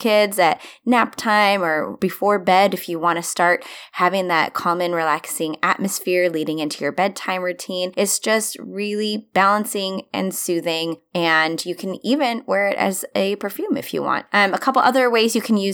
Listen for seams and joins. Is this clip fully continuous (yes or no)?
yes